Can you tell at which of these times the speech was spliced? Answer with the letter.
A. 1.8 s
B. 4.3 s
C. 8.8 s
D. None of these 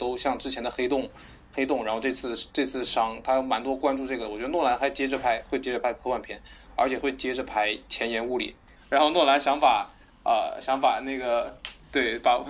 C